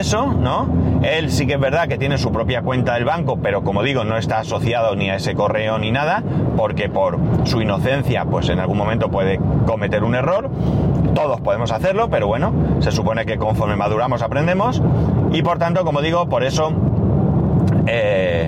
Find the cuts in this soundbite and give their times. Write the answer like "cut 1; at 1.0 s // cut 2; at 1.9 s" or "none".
none